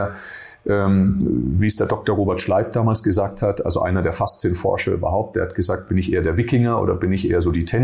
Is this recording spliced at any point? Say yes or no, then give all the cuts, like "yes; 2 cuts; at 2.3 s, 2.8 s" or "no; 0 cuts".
no; 0 cuts